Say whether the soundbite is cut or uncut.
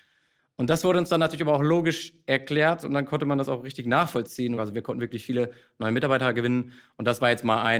cut